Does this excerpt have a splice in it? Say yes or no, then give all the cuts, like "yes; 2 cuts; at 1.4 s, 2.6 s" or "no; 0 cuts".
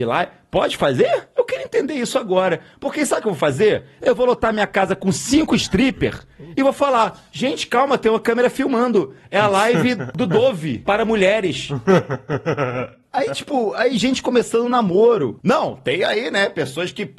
yes; 1 cut; at 15.4 s